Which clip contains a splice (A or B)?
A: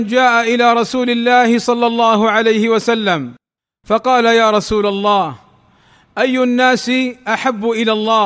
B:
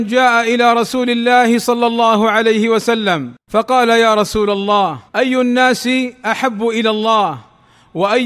B